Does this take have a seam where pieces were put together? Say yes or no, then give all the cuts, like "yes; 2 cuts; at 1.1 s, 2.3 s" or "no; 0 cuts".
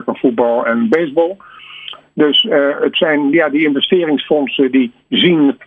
no; 0 cuts